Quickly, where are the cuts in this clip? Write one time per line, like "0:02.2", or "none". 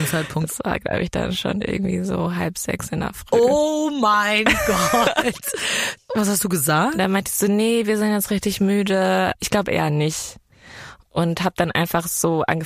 none